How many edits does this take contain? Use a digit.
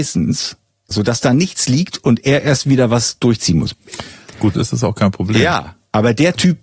2